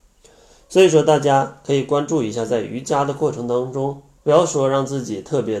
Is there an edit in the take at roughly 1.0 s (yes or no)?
no